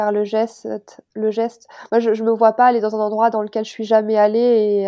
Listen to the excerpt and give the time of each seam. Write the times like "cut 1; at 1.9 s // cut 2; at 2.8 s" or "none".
none